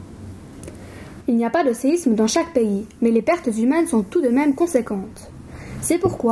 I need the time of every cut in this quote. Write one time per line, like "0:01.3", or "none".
0:01.2